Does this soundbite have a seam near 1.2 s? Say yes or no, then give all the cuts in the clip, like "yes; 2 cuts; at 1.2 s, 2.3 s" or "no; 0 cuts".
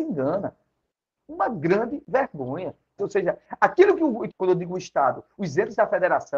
yes; 3 cuts; at 1.2 s, 3.0 s, 4.3 s